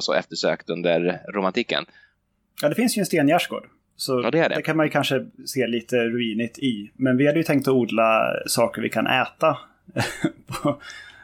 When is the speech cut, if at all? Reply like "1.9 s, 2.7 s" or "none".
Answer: none